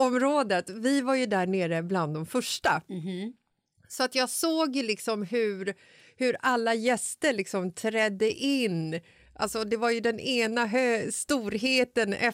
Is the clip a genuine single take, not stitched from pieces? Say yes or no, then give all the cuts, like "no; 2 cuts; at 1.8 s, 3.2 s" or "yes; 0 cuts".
yes; 0 cuts